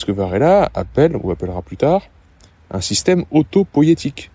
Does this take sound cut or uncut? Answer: uncut